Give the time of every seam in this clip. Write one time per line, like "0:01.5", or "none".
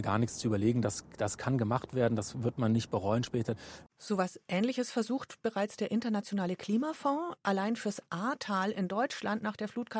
0:03.9
0:07.4